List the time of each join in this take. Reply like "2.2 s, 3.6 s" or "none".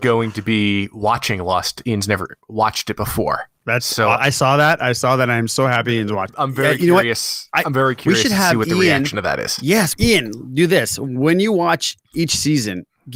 none